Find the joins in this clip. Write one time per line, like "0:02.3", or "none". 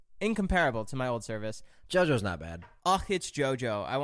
0:01.9

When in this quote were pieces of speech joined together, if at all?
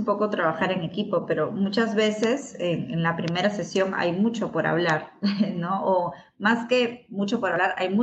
none

